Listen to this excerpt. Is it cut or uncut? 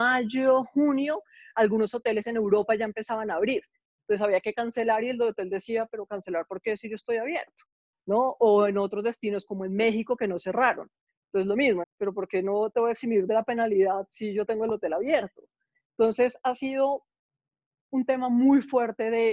cut